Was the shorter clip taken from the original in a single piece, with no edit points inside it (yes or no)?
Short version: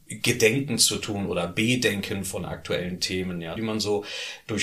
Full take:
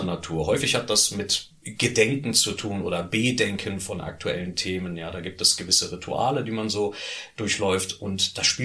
no